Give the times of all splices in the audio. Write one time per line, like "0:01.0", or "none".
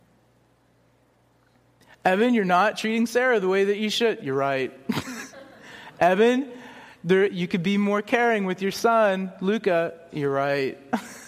none